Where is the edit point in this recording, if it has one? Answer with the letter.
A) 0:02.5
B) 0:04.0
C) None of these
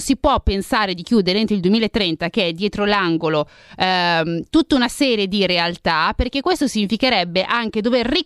C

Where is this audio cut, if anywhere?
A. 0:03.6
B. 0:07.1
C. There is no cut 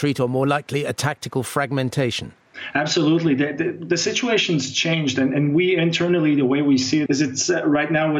B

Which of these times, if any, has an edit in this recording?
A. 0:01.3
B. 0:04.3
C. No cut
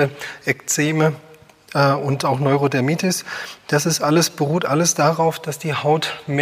C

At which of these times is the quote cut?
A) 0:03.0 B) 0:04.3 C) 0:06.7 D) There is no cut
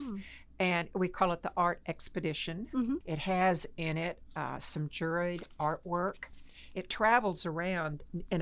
A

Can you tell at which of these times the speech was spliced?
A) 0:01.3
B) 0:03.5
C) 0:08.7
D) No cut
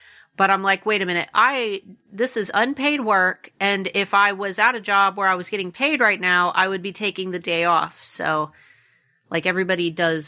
D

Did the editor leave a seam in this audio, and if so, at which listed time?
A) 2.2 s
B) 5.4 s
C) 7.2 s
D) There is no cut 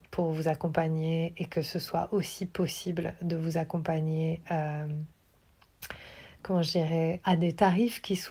C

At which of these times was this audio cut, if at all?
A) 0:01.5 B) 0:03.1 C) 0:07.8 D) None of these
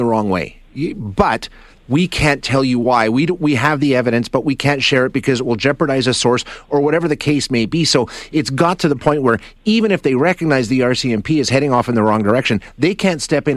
D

